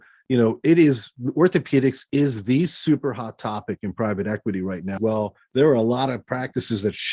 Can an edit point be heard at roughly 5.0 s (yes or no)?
yes